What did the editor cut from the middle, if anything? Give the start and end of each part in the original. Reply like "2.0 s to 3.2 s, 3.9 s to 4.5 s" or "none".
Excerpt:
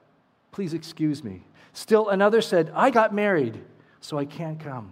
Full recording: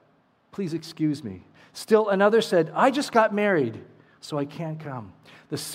2.9 s to 3.1 s